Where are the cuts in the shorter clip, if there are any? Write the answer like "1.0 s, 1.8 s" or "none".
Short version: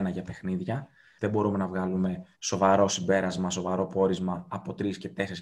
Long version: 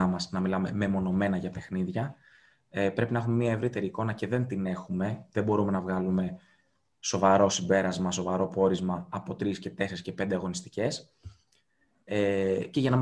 1.2 s, 2.3 s